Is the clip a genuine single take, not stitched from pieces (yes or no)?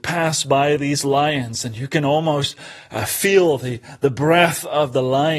yes